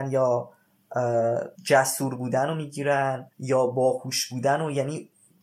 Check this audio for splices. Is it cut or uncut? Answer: cut